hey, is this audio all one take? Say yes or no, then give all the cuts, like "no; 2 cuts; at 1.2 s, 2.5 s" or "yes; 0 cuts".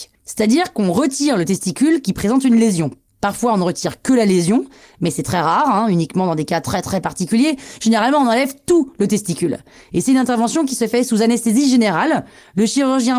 yes; 0 cuts